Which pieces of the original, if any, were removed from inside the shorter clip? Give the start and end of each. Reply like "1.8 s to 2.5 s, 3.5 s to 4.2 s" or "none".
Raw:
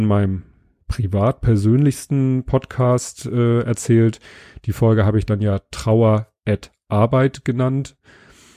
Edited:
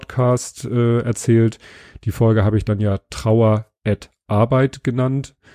none